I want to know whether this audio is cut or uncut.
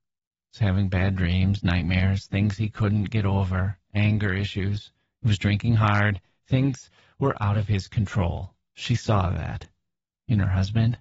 uncut